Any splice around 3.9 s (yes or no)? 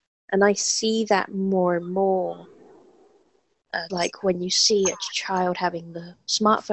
yes